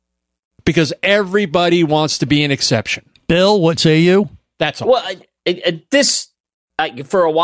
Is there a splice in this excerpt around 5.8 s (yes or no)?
no